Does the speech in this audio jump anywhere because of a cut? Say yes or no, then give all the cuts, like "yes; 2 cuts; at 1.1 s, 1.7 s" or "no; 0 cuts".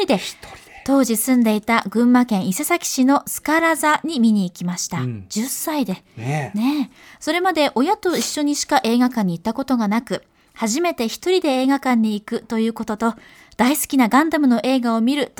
no; 0 cuts